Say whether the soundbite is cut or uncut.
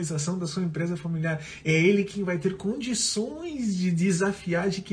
uncut